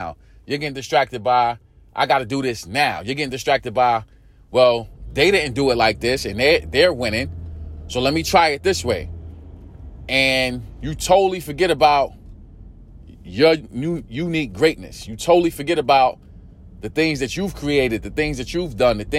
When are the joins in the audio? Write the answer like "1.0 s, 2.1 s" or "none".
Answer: none